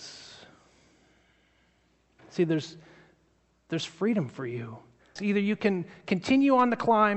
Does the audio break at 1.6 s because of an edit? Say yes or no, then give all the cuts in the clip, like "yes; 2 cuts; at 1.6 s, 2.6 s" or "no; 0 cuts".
no; 1 cut; at 5.2 s